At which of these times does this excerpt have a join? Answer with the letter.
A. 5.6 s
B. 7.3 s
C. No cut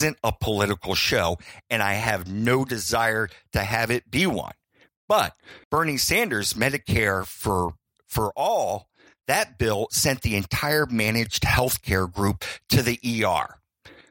A